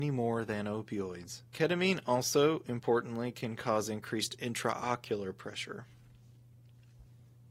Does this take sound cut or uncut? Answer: cut